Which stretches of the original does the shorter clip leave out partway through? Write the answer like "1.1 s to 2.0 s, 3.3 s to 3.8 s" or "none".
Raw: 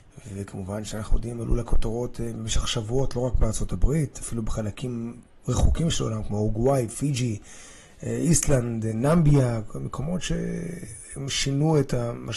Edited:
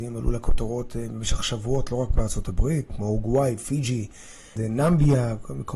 4.1 s to 6.2 s, 7.9 s to 8.8 s